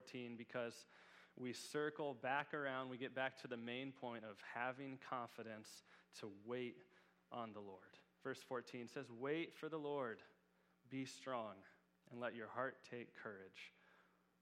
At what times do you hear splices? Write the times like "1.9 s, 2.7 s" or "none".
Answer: none